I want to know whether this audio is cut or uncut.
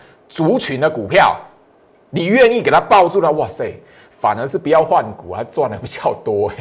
uncut